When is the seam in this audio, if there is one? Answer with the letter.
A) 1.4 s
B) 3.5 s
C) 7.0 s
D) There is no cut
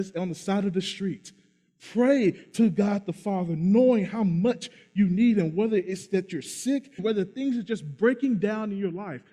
C